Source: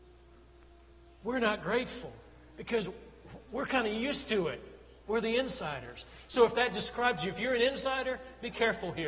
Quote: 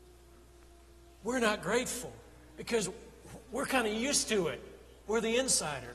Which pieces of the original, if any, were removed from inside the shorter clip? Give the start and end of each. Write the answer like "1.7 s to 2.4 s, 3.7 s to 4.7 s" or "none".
none

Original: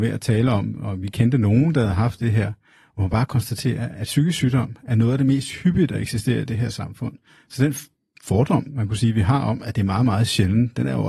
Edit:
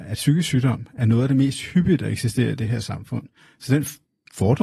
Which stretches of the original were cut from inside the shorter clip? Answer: none

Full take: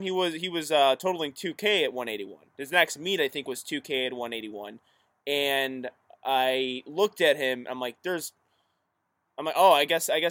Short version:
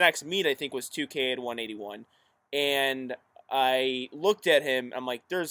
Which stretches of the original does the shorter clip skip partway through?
none

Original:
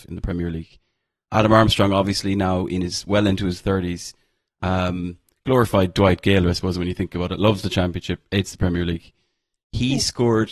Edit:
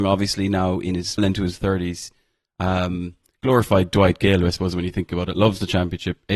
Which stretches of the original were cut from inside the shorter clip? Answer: 3.0 s to 3.2 s

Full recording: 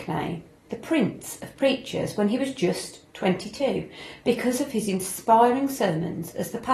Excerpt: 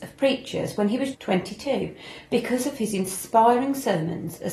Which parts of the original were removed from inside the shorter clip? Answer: 2.5 s to 3.1 s

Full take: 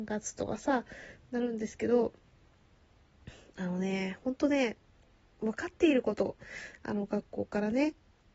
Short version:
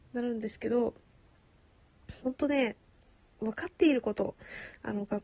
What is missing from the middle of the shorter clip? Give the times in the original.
3.4 s to 4.2 s

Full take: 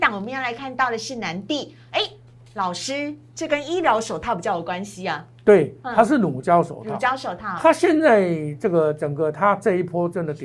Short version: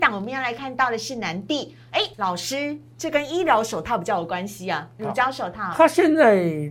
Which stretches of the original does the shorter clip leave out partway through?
2.1 s to 2.5 s, 5.4 s to 6.8 s

